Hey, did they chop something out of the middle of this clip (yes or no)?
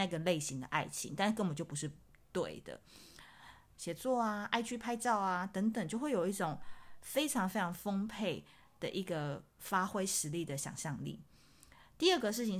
yes